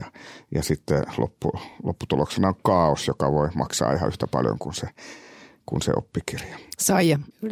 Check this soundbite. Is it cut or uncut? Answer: uncut